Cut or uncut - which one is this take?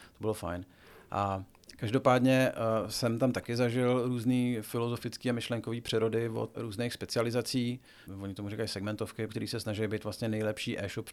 cut